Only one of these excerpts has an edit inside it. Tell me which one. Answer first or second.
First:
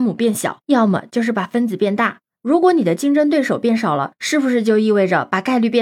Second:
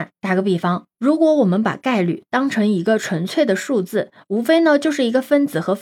first